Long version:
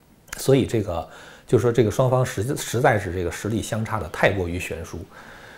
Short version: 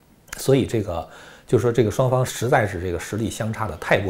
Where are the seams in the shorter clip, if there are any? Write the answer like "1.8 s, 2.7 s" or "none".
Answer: 2.3 s